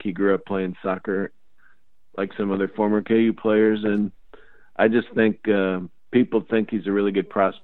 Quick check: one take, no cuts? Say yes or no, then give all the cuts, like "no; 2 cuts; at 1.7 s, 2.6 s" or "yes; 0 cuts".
yes; 0 cuts